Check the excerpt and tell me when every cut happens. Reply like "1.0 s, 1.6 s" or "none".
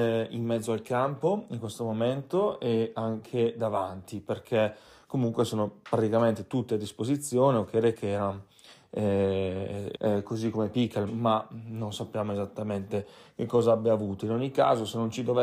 9.9 s, 11.1 s